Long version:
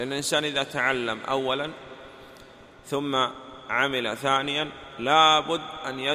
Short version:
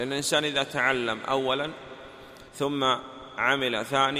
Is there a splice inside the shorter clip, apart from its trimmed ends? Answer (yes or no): yes